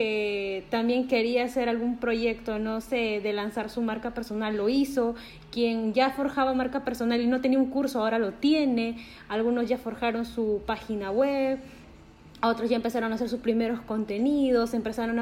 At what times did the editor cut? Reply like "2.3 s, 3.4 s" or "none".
none